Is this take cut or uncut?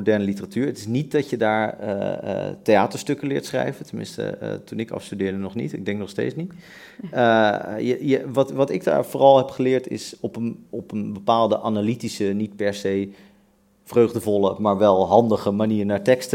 uncut